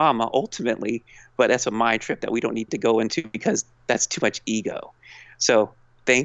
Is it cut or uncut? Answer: uncut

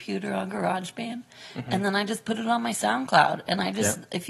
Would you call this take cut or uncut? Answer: uncut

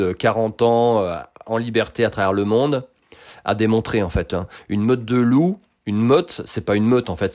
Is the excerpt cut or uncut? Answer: uncut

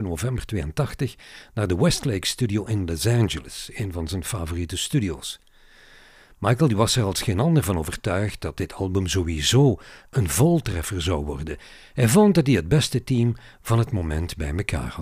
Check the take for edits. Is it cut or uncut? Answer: uncut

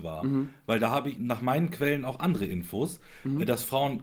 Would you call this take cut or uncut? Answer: cut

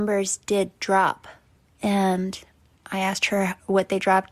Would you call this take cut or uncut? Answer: uncut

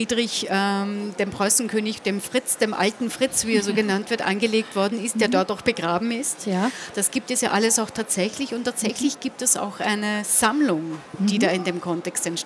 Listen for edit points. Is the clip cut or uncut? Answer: uncut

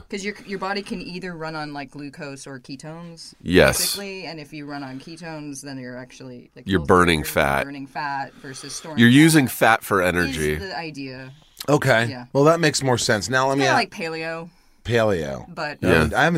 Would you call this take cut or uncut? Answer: uncut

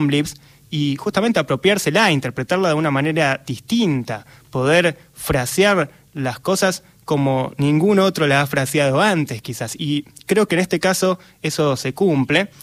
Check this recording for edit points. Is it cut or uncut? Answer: uncut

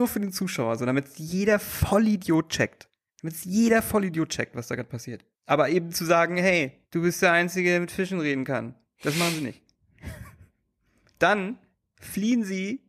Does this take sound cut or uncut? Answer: uncut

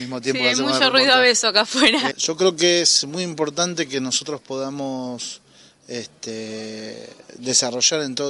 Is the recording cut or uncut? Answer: cut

